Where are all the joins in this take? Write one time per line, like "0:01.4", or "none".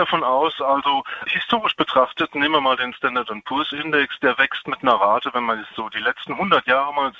0:01.3

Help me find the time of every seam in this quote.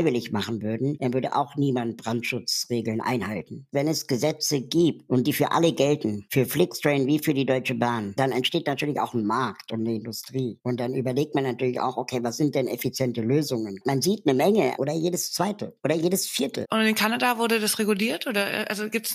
0:14.8
0:16.6

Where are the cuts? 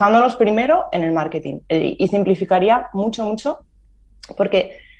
none

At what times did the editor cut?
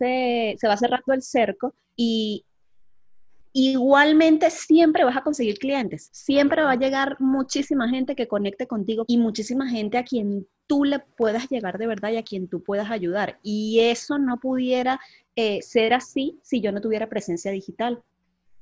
0:09.1

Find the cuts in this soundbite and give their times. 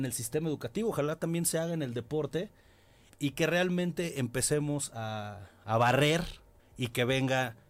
0:03.1
0:06.6

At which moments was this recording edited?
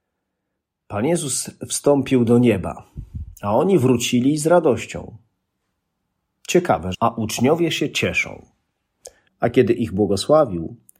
0:06.9
0:09.3

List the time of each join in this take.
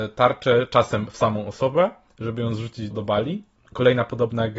0:02.9

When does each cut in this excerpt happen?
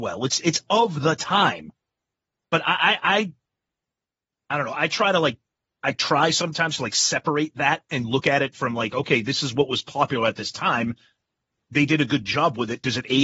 none

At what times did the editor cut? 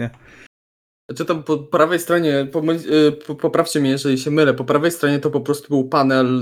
none

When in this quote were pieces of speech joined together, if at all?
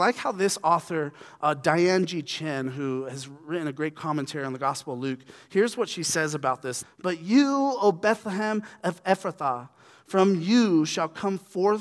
0:06.8

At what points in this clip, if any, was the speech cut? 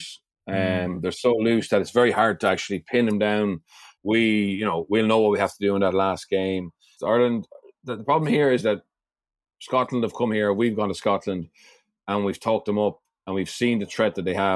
0:04.0
0:07.0

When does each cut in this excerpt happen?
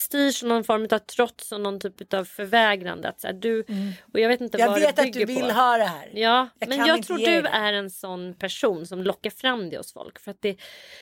none

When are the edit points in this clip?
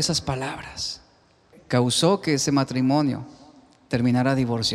0:01.5

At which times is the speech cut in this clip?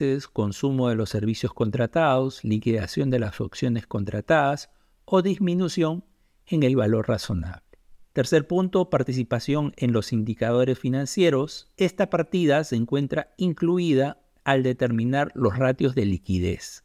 0:08.0
0:11.8

